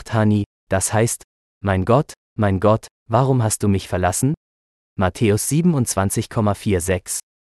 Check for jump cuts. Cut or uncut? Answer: uncut